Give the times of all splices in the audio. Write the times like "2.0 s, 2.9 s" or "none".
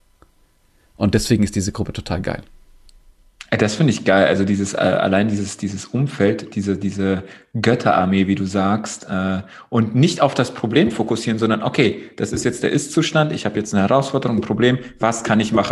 none